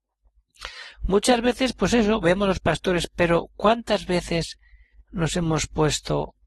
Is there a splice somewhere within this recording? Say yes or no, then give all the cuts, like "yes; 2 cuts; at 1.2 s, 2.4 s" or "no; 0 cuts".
yes; 1 cut; at 0.9 s